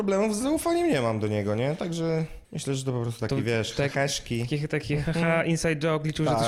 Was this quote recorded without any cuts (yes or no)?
no